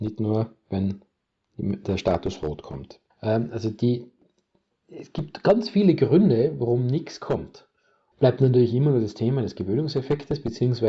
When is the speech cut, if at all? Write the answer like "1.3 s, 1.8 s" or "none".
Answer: 3.1 s, 8.1 s